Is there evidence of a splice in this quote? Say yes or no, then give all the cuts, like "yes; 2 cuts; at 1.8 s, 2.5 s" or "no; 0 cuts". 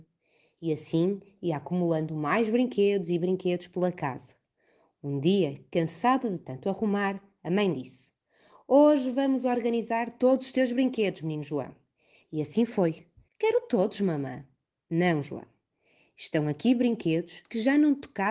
yes; 1 cut; at 13.3 s